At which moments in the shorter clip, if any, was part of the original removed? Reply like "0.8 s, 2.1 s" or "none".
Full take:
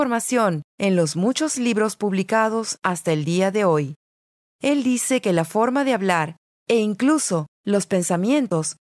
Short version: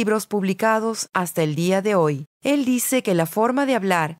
2.3 s

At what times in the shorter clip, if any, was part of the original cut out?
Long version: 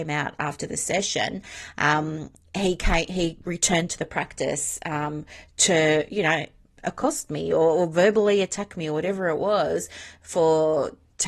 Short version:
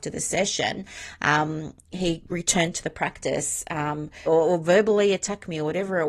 1.9 s, 4.3 s

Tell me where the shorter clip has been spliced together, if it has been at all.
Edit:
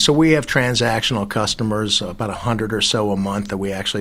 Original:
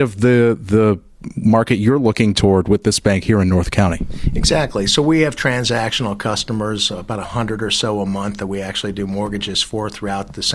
none

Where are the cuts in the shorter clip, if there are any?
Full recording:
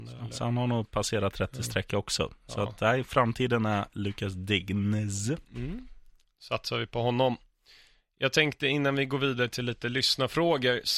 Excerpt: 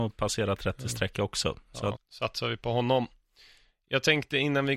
1.9 s

